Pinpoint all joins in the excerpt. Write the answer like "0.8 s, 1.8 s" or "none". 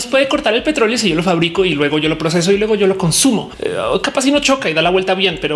3.6 s